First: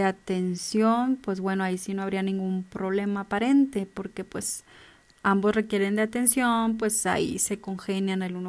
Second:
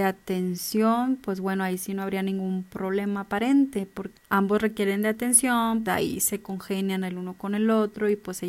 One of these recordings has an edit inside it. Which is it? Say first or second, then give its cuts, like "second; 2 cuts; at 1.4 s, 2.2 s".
second; 2 cuts; at 4.1 s, 5.9 s